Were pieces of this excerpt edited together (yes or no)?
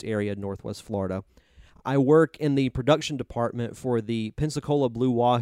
no